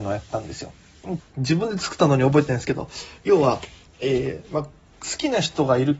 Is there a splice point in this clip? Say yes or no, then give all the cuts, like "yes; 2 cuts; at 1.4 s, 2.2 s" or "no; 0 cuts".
yes; 1 cut; at 1.2 s